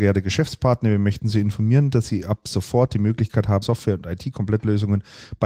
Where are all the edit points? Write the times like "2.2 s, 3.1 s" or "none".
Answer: 3.6 s